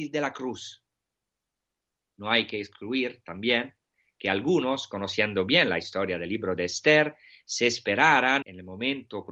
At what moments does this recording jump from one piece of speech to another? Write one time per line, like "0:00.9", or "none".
0:08.4